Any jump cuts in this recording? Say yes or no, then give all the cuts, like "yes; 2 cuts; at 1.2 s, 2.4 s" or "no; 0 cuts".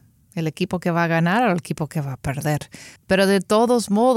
yes; 1 cut; at 3.0 s